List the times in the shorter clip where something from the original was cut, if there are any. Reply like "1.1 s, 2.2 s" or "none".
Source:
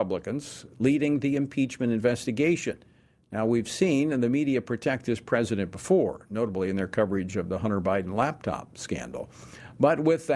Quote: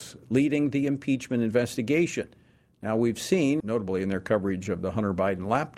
3.6 s